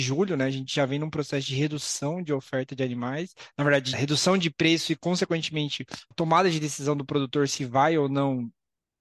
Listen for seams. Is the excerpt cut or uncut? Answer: cut